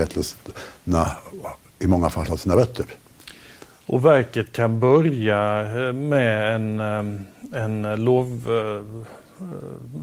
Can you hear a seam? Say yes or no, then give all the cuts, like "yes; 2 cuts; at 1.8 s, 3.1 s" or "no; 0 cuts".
no; 0 cuts